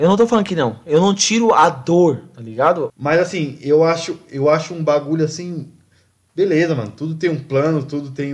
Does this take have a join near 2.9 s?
yes; 1 cut; at 2.9 s

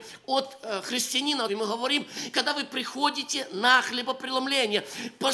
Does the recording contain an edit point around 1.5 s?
yes; 1 cut; at 1.5 s

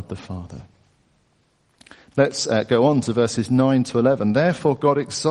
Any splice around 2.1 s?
yes; 1 cut; at 2.1 s

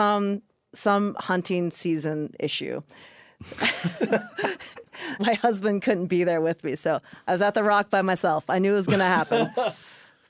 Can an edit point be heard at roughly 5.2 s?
yes; 1 cut; at 5.2 s

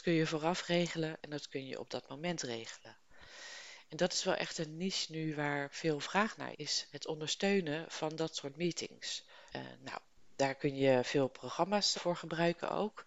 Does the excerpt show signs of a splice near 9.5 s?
yes; 3 cuts; at 6.5 s, 9.5 s, 11.9 s

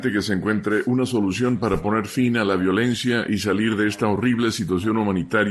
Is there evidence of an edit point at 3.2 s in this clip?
no; 0 cuts

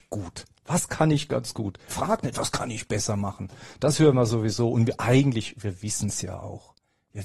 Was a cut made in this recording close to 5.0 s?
no; 1 cut; at 1.9 s

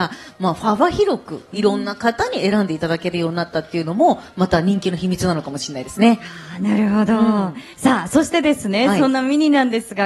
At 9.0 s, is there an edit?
no; 1 cut; at 7.7 s

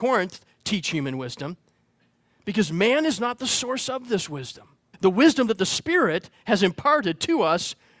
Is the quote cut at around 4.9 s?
yes; 1 cut; at 4.9 s

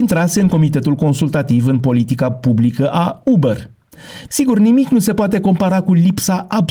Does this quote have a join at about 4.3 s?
yes; 1 cut; at 4.3 s

